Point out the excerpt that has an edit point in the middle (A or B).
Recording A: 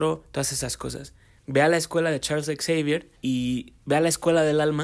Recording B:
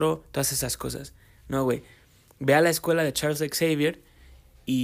A